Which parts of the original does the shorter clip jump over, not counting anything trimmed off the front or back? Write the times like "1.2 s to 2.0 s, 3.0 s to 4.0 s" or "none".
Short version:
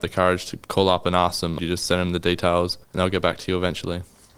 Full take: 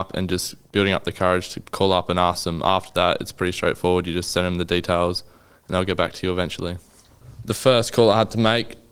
2.6 s to 4.0 s, 5.3 s to 5.6 s